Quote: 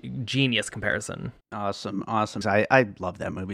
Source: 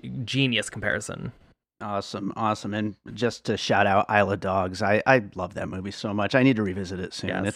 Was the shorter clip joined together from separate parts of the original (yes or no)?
yes